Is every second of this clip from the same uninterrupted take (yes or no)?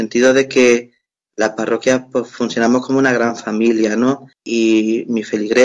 no